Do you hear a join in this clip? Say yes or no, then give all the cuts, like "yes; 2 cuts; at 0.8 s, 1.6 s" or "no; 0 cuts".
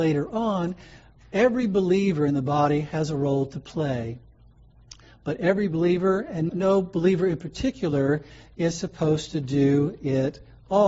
yes; 1 cut; at 6.5 s